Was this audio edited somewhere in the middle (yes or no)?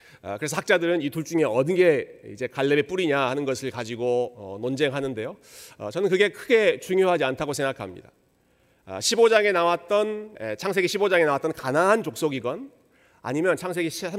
yes